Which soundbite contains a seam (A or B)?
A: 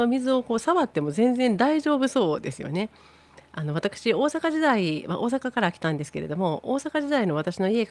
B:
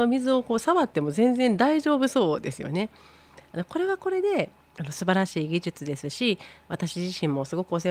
B